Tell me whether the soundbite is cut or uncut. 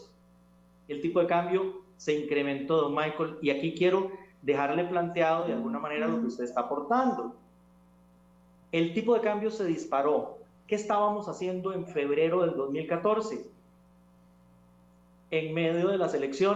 uncut